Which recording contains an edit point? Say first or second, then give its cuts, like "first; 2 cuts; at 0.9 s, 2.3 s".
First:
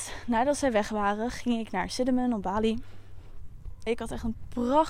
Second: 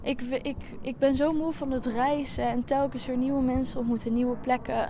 first; 1 cut; at 3.9 s